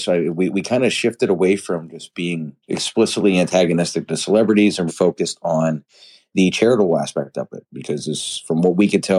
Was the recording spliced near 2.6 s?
yes; 2 cuts; at 2.6 s, 4.9 s

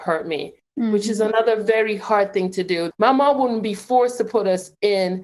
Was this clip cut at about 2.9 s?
yes; 1 cut; at 2.9 s

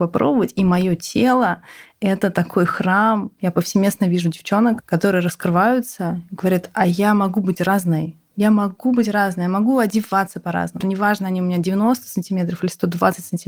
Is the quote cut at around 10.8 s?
yes; 2 cuts; at 3.4 s, 10.8 s

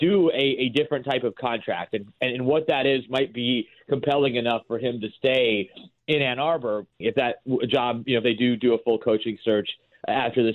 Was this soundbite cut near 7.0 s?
yes; 1 cut; at 7.0 s

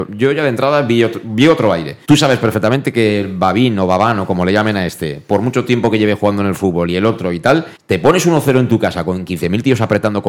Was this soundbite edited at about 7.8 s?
yes; 2 cuts; at 2.0 s, 7.8 s

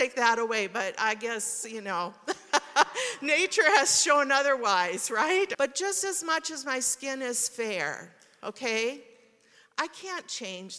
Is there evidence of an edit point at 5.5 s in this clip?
yes; 1 cut; at 5.5 s

